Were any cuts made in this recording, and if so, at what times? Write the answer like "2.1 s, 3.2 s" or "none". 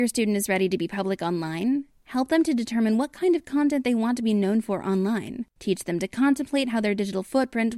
5.5 s